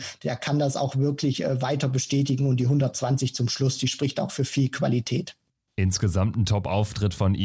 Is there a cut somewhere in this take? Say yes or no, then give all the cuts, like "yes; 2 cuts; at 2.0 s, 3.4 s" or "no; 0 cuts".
no; 0 cuts